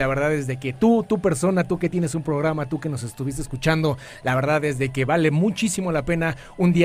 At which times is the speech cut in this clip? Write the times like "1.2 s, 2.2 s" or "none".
none